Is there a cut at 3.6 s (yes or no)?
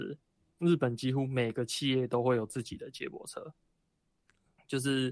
no